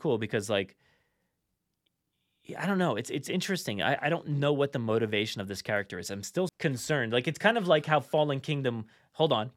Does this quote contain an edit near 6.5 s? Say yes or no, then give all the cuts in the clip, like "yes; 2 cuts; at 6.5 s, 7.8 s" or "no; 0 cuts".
yes; 1 cut; at 6.5 s